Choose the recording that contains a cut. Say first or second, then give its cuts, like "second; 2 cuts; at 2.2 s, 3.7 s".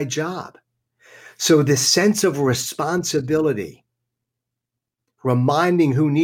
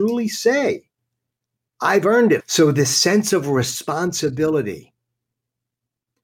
second; 1 cut; at 2.4 s